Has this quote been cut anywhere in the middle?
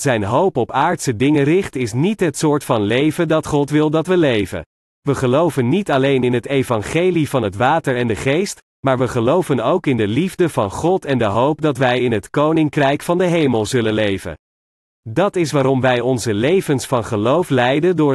yes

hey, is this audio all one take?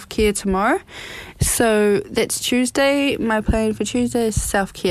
yes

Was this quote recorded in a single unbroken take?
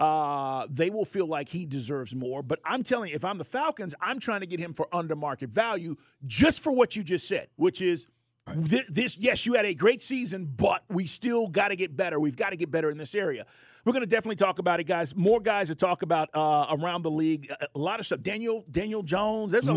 no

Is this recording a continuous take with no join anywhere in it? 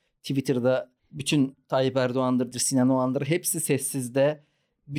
no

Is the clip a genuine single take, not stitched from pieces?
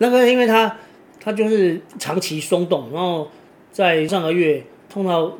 no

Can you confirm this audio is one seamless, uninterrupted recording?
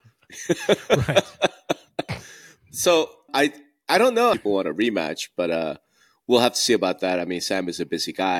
no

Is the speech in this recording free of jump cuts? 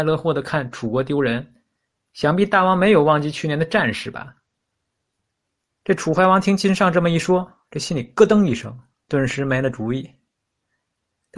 yes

